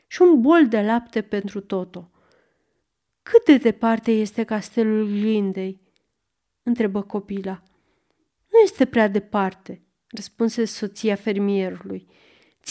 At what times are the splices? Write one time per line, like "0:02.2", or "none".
none